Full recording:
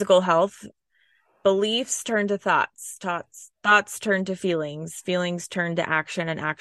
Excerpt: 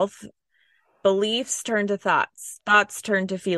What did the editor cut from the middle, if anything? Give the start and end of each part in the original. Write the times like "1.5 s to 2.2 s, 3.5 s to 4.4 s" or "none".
3.0 s to 3.5 s